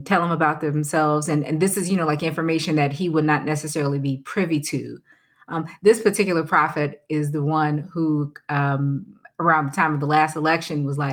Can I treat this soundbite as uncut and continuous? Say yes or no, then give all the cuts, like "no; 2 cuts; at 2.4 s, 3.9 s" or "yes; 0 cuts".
yes; 0 cuts